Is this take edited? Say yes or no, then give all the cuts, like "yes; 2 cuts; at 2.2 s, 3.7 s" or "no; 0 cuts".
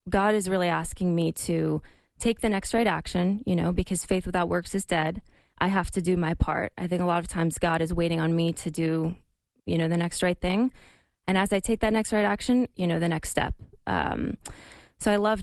yes; 1 cut; at 12.7 s